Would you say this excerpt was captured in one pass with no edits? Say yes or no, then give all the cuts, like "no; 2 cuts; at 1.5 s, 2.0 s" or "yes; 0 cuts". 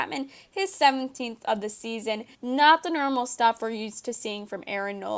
no; 1 cut; at 2.3 s